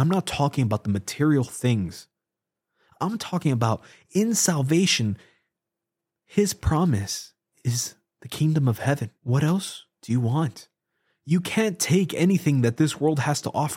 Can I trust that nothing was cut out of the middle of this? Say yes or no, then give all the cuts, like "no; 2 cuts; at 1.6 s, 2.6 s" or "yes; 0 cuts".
no; 1 cut; at 9.2 s